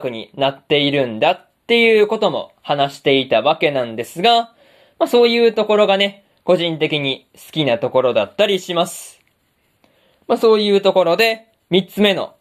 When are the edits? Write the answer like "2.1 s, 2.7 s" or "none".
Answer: none